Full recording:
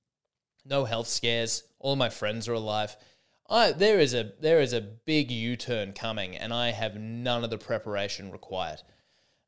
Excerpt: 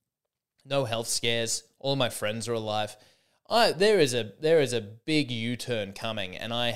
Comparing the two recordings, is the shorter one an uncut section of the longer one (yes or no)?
yes